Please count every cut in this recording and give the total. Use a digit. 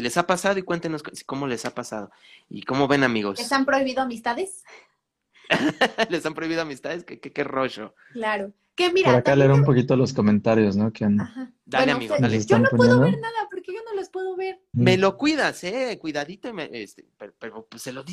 1